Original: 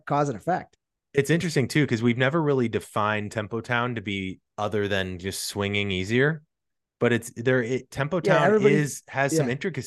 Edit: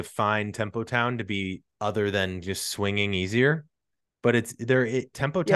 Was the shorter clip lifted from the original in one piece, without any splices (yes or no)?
yes